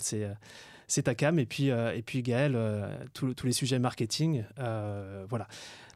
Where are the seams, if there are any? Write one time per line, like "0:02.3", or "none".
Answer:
none